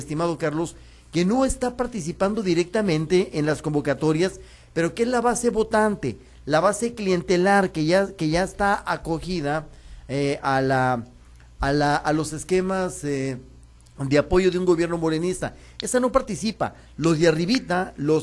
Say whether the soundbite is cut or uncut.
uncut